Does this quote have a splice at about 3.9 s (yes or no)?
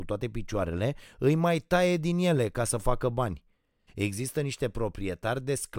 yes